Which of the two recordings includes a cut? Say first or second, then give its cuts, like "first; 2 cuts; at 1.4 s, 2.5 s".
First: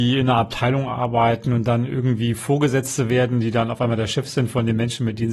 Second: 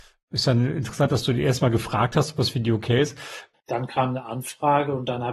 second; 1 cut; at 3.5 s